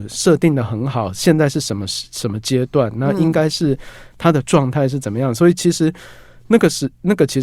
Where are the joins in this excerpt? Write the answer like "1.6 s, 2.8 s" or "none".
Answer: none

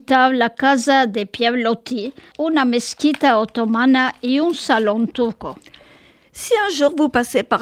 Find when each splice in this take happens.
2.3 s

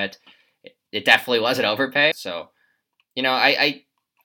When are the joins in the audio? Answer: 2.1 s

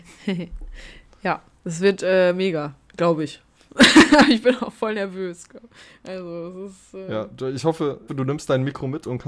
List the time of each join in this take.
8.1 s

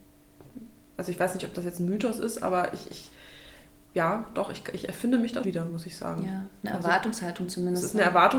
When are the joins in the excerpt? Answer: 5.4 s

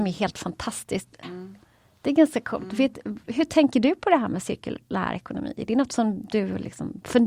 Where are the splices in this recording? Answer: 1.2 s

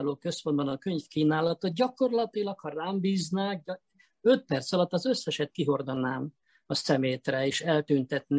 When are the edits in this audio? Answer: none

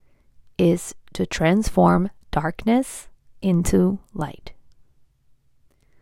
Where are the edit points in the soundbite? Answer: none

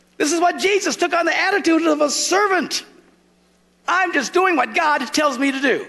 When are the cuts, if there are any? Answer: none

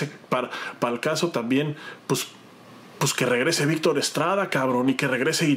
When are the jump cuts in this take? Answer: none

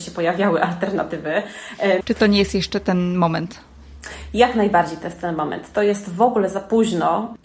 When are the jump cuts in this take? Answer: 2.0 s

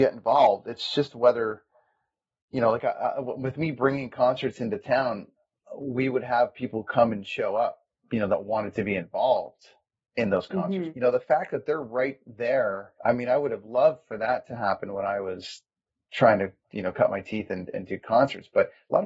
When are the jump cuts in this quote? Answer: 10.9 s, 13.0 s

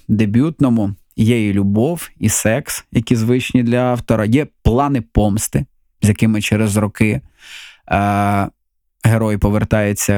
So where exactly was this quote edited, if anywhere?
none

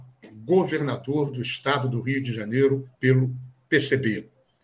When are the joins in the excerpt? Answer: 2.9 s

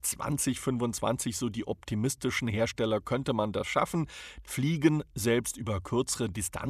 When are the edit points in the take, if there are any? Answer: 4.4 s

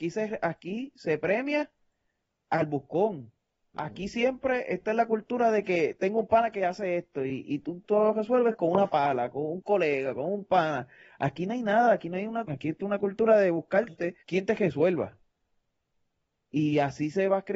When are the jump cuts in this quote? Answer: 12.5 s, 14.2 s

